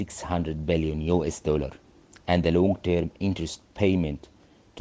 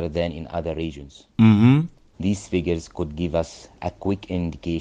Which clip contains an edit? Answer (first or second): second